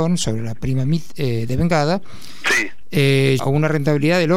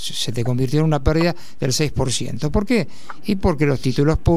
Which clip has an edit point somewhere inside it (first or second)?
first